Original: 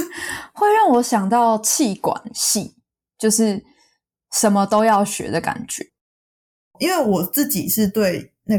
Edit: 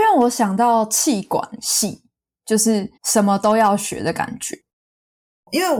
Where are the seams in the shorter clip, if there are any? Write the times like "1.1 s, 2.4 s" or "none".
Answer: 3.0 s

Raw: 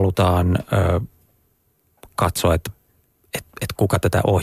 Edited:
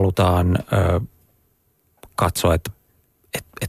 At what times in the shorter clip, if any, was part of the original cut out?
none

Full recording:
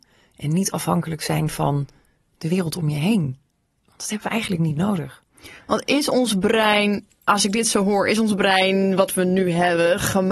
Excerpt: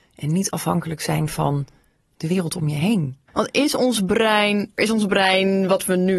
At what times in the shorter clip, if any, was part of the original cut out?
3.3 s, 4.8 s

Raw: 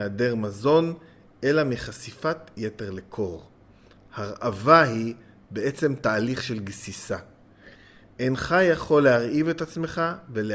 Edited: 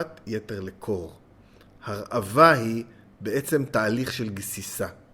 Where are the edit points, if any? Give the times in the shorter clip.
none

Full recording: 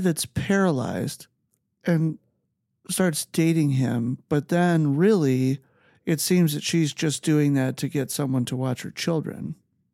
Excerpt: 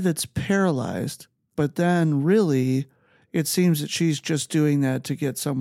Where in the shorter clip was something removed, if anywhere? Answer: 1.5 s

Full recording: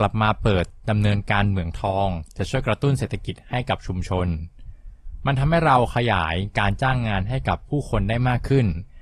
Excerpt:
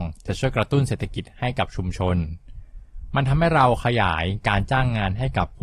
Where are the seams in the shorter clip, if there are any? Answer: none

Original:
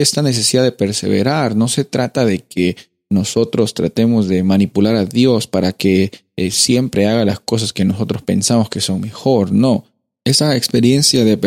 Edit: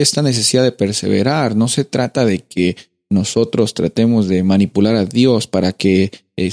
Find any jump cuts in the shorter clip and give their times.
none

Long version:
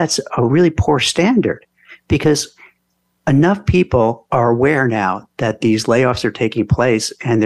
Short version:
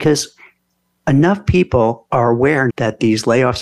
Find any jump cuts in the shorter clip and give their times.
2.7 s

